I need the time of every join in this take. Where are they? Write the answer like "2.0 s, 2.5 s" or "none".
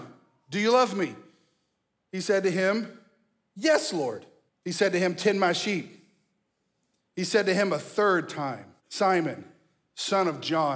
4.5 s, 8.8 s